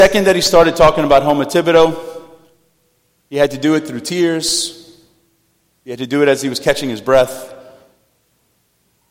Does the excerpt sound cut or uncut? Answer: uncut